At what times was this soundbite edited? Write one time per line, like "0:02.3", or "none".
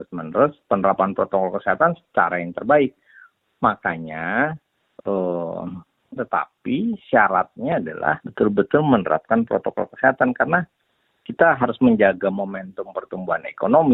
0:06.2
0:08.2